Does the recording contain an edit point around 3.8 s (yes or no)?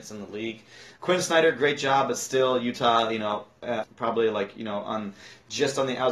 yes